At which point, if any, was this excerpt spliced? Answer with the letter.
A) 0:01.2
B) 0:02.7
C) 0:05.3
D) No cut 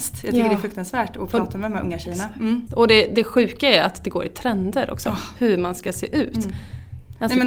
B